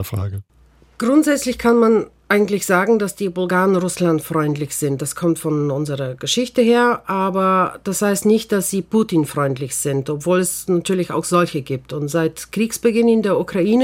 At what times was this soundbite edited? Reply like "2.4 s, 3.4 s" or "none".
none